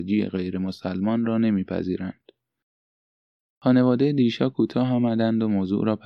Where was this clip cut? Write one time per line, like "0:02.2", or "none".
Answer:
0:03.6